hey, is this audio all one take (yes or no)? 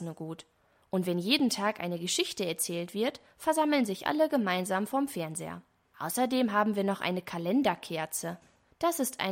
yes